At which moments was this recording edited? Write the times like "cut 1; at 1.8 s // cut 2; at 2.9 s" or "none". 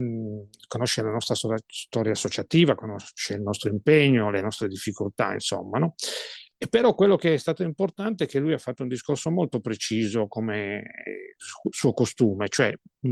none